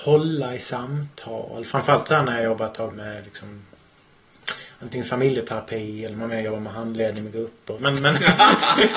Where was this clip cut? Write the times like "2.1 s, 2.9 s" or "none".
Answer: 2.9 s, 7.8 s